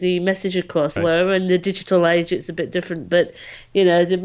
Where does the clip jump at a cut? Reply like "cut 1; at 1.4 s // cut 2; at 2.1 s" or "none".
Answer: cut 1; at 1.0 s